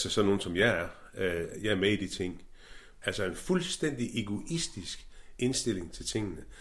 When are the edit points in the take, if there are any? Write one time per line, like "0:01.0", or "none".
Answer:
0:03.0